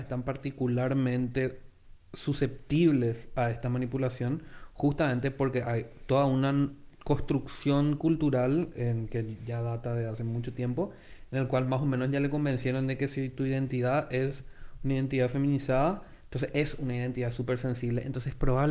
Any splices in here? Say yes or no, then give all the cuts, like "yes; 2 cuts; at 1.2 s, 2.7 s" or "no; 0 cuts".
no; 0 cuts